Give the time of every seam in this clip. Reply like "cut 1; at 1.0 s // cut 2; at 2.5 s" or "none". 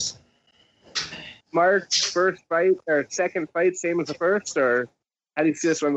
cut 1; at 1.4 s